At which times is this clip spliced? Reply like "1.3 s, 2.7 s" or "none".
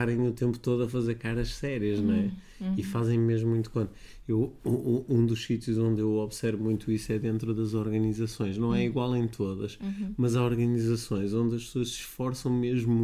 none